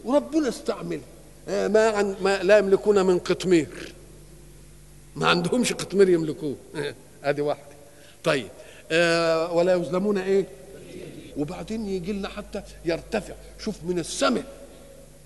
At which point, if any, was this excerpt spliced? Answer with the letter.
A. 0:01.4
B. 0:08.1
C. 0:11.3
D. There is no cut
C